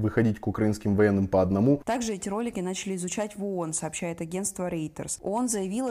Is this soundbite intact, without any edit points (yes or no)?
no